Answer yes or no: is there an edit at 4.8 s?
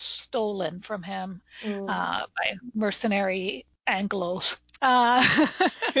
yes